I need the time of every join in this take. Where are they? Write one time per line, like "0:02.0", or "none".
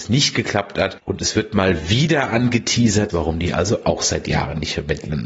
0:01.0
0:03.1